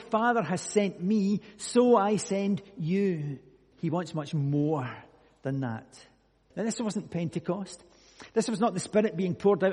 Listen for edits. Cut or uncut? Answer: cut